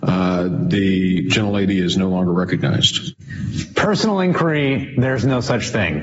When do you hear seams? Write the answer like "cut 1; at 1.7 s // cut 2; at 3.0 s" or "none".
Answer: none